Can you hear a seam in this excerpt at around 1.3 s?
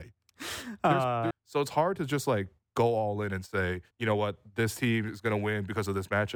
yes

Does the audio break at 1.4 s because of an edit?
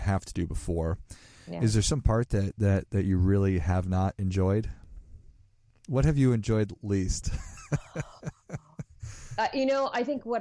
no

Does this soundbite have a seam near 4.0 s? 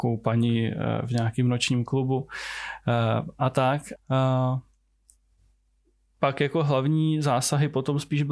yes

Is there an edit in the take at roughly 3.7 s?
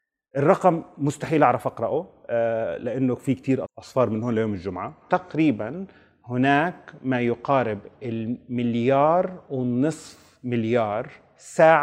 yes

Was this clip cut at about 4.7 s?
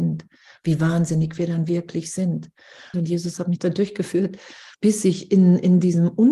yes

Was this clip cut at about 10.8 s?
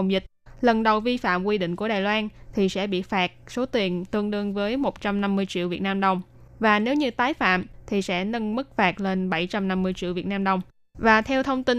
no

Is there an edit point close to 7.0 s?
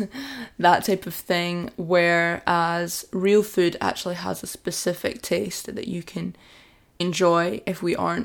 yes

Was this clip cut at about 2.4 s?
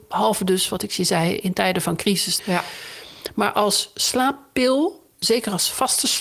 yes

